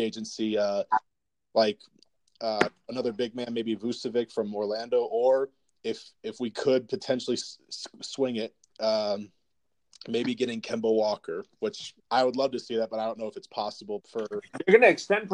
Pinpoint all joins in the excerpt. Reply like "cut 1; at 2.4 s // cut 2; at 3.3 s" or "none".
cut 1; at 12.0 s // cut 2; at 14.0 s